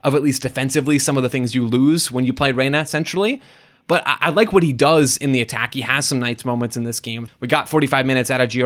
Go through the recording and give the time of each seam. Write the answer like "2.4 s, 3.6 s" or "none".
7.3 s